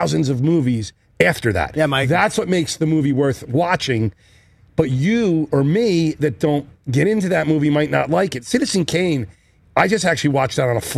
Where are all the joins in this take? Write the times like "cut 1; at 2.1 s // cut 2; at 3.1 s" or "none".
none